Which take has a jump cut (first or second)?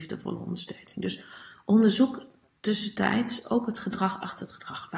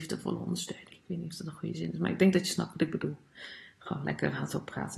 second